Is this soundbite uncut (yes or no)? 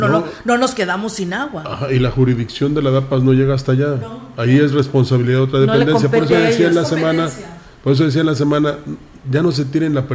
yes